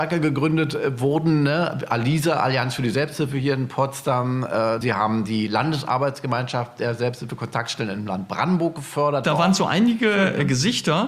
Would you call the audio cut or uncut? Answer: cut